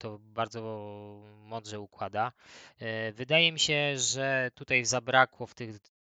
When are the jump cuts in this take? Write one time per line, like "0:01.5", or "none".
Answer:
none